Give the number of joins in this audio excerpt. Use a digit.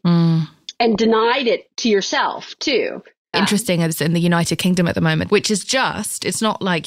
2